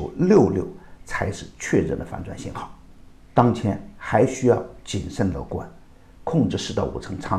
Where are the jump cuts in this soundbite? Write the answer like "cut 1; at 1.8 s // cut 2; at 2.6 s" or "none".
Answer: none